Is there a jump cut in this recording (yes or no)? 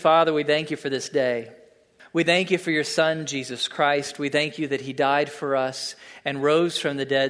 yes